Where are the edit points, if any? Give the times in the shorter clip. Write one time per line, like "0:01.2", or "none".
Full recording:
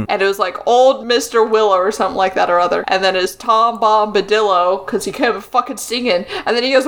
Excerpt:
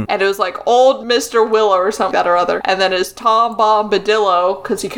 0:02.1